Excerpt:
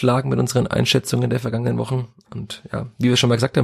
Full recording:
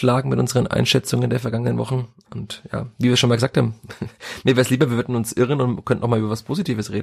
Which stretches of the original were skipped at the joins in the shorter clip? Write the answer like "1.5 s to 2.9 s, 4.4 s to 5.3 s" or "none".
none